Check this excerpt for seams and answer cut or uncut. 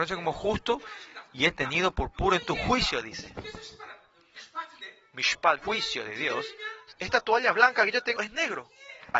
cut